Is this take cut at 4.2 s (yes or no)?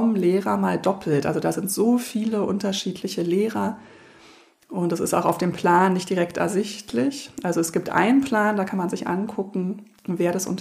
no